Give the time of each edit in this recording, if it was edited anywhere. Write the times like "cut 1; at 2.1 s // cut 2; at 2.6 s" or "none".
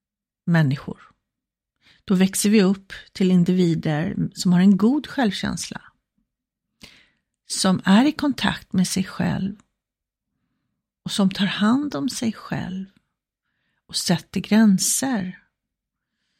none